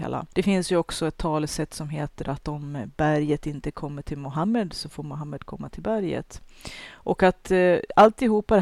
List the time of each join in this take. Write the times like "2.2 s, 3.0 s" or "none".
none